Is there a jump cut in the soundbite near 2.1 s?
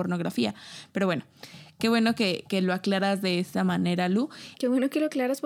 no; 1 cut; at 4.5 s

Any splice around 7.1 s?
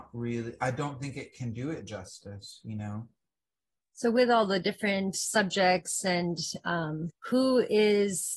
yes; 1 cut; at 7.1 s

